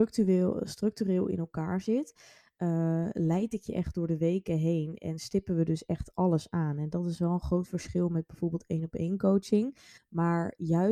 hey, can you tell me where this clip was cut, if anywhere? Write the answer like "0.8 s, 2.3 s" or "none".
10.0 s